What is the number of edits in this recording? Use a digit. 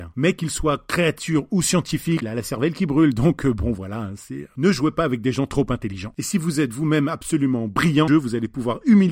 2